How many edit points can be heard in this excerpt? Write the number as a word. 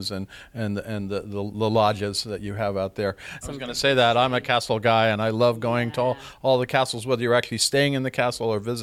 one